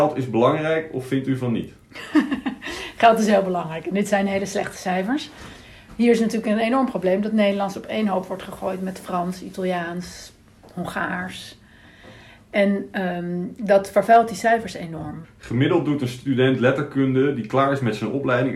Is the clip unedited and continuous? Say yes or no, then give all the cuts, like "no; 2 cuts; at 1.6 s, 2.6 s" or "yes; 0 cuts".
no; 1 cut; at 15.2 s